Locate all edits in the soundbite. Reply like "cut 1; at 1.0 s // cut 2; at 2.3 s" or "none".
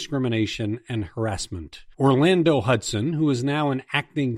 cut 1; at 1.9 s